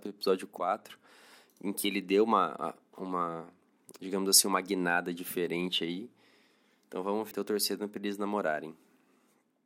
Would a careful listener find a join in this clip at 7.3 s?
yes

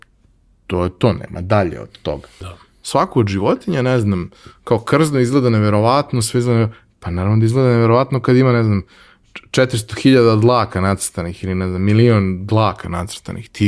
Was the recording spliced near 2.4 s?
yes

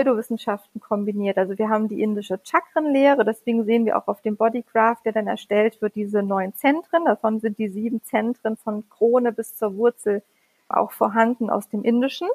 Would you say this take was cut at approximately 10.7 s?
yes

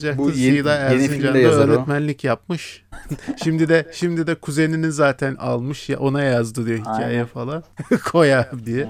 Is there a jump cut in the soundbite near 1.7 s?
no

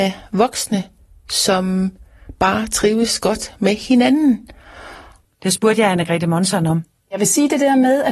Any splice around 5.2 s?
yes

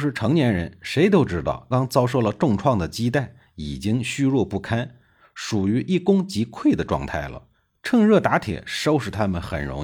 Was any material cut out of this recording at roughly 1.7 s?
yes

